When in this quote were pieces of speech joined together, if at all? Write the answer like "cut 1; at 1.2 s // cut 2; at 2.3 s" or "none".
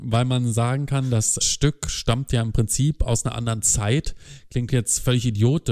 cut 1; at 1.4 s